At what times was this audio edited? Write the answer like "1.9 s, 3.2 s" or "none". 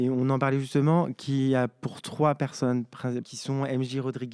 3.2 s